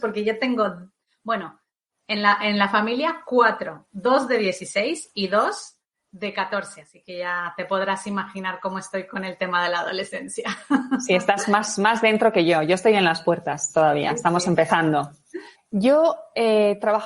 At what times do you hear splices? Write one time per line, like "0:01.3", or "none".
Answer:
0:15.5